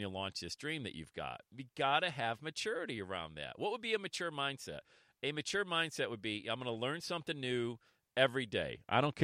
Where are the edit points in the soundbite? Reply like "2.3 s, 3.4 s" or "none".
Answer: none